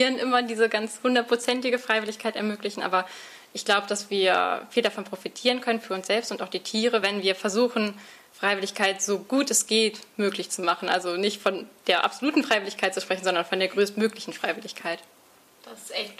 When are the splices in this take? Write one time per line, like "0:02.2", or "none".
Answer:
none